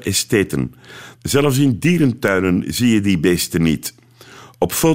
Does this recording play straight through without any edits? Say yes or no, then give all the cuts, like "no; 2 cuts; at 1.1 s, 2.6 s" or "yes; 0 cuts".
no; 1 cut; at 1.1 s